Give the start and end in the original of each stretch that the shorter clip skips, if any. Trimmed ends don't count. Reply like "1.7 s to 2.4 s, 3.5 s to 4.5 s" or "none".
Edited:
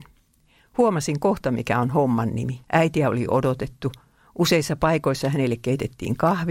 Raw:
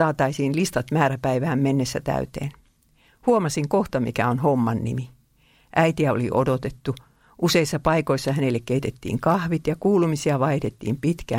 5.1 s to 5.7 s